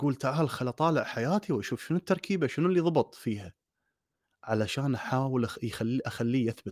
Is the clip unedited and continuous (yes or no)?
yes